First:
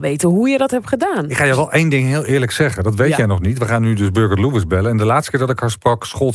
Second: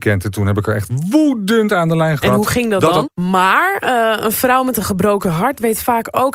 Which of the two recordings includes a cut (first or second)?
second